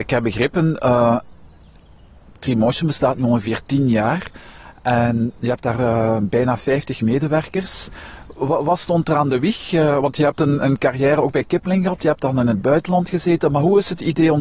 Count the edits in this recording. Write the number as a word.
zero